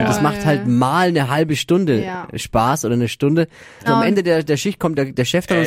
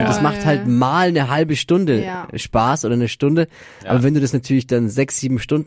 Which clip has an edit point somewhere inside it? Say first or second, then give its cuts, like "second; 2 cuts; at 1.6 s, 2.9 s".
first; 1 cut; at 3.9 s